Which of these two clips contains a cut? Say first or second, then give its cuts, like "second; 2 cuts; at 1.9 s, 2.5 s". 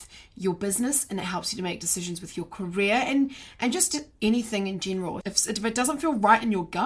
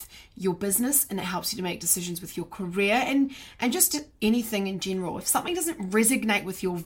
first; 1 cut; at 5.2 s